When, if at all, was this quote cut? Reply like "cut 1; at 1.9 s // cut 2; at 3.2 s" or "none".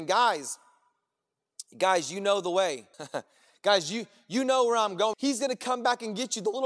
cut 1; at 2.9 s // cut 2; at 5.1 s